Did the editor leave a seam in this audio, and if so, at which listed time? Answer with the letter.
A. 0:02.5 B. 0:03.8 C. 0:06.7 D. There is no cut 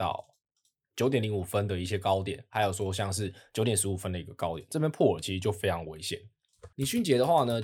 C